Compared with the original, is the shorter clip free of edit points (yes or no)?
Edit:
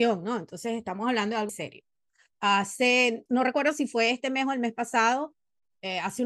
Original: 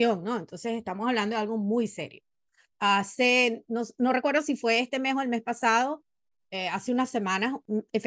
no